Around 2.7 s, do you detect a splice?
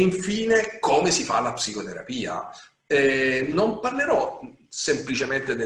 no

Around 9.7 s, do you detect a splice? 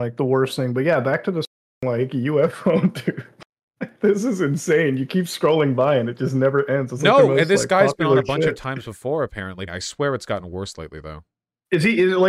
yes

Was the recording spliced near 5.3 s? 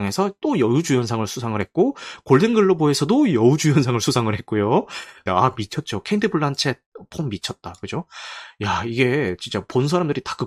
yes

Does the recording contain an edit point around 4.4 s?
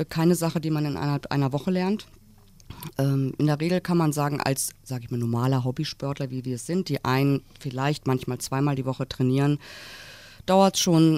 no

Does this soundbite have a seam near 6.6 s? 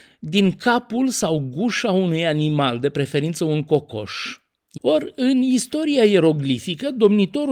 no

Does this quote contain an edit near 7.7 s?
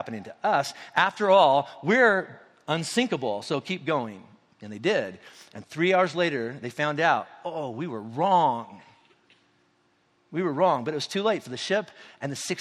no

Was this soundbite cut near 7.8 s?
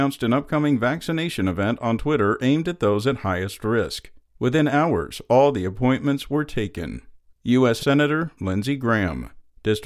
yes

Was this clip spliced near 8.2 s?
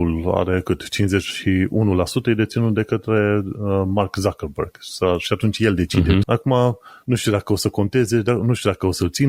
no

